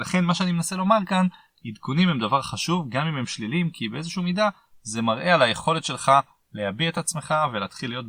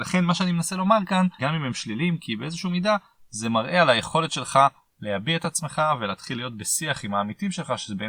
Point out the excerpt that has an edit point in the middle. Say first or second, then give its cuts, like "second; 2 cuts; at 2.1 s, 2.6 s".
second; 1 cut; at 1.4 s